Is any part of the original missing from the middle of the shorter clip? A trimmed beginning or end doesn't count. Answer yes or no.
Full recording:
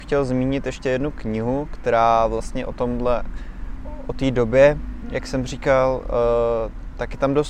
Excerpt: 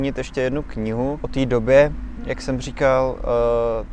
yes